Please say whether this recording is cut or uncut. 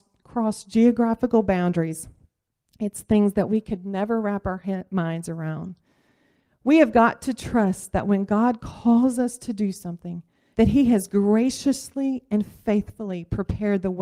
cut